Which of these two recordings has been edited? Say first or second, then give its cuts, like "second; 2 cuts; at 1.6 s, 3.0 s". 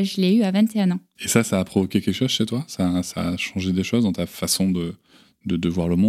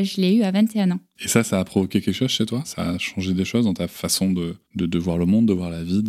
second; 2 cuts; at 2.6 s, 4.6 s